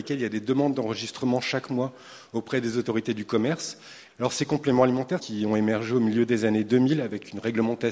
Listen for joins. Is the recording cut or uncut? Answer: cut